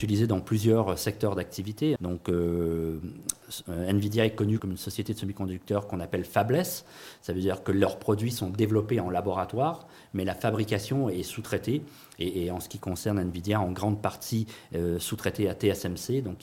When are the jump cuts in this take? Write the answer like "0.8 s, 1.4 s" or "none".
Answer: 2.0 s, 4.6 s